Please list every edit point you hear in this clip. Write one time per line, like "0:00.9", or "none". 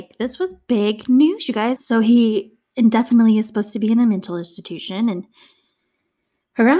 0:01.8